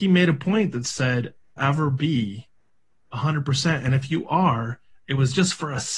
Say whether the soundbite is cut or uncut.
cut